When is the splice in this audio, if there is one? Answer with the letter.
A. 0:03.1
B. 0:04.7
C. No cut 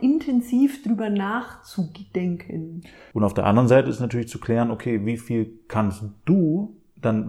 A